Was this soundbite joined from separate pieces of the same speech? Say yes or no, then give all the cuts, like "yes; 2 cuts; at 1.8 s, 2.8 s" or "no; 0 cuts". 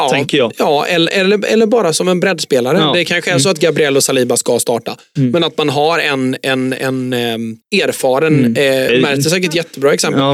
yes; 2 cuts; at 7.6 s, 8.9 s